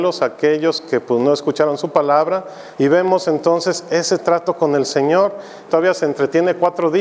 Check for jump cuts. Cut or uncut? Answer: cut